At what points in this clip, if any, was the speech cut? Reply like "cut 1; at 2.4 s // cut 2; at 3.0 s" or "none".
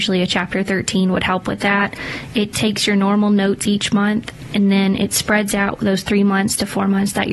none